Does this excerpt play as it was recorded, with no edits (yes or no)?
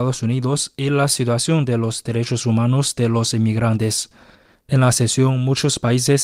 yes